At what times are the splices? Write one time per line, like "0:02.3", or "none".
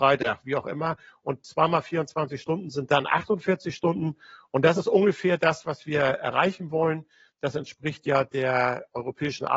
none